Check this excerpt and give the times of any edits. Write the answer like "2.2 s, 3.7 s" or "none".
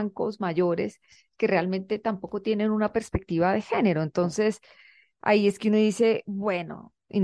none